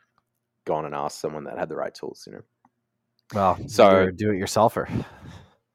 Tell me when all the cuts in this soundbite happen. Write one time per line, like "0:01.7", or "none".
none